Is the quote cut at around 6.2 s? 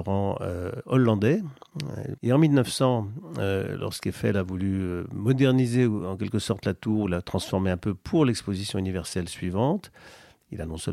no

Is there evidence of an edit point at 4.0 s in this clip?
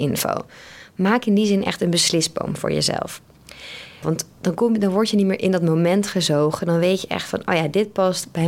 yes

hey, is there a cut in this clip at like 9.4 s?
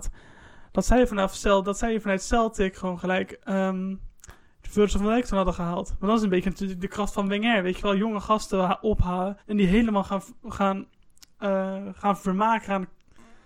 yes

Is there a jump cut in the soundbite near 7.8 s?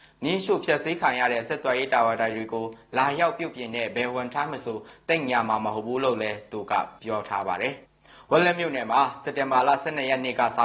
yes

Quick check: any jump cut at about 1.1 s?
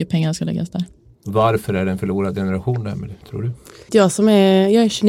no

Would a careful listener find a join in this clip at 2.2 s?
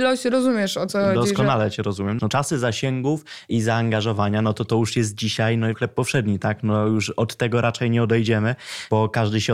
yes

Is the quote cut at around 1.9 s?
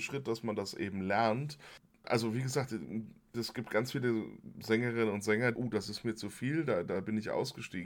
no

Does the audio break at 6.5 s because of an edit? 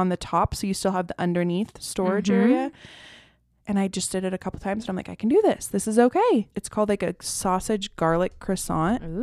yes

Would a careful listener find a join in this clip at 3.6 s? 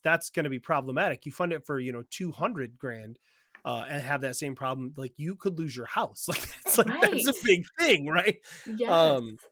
no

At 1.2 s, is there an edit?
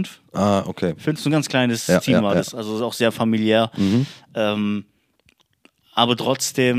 no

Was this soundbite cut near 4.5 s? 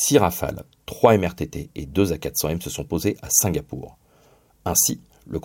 yes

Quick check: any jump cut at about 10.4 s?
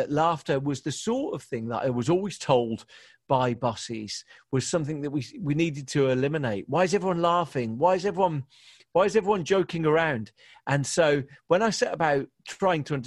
no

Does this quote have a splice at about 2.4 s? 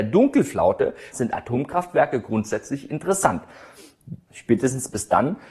no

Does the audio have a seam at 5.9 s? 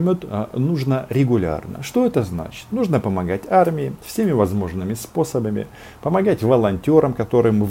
no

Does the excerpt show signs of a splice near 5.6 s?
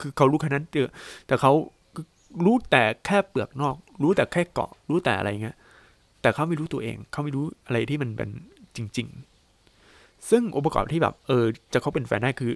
no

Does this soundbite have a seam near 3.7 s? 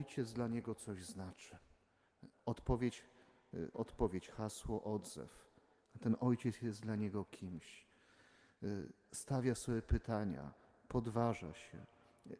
yes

